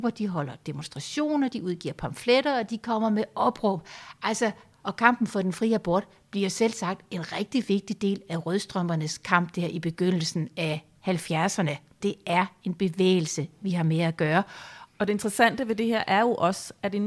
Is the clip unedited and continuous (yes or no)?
no